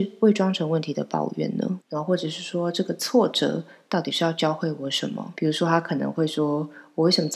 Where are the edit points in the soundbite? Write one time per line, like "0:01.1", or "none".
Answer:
0:01.8
0:05.4